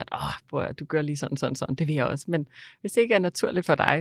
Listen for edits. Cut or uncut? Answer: uncut